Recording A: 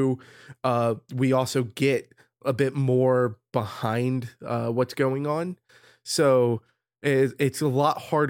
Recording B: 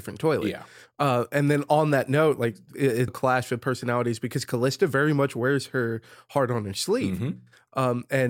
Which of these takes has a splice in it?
B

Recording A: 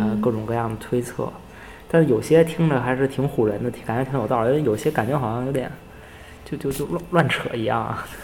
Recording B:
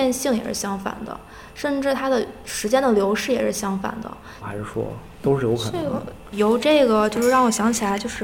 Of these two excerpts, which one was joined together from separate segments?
B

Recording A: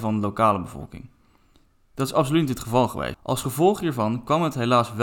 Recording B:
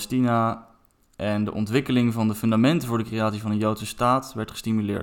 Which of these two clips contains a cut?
A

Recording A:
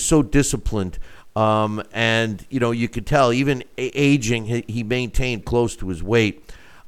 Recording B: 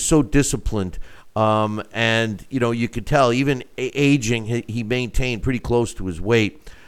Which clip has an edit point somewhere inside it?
A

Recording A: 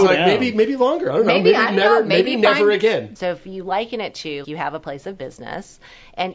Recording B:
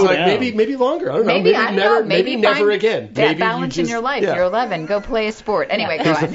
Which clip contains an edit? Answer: A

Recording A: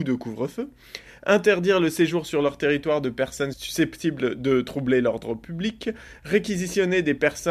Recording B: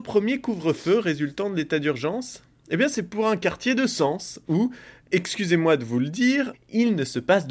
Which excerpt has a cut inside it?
B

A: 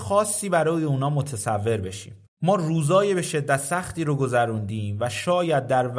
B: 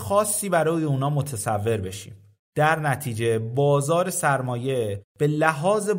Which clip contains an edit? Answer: A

